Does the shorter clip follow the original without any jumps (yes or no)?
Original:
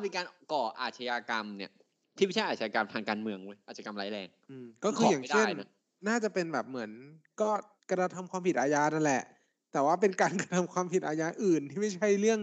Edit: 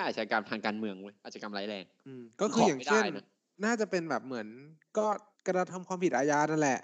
yes